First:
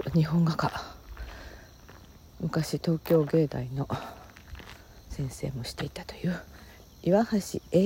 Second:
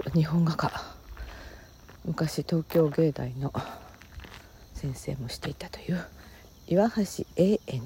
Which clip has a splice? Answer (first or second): second